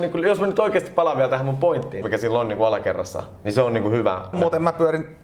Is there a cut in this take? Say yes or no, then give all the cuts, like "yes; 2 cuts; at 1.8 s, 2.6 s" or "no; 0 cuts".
yes; 2 cuts; at 2.0 s, 4.3 s